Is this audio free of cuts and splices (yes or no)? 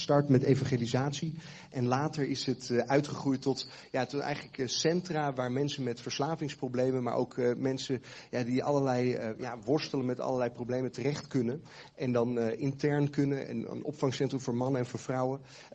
yes